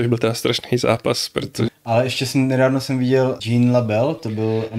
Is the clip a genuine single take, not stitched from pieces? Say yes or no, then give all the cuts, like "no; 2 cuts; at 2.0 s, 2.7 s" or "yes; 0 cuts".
no; 2 cuts; at 1.7 s, 3.4 s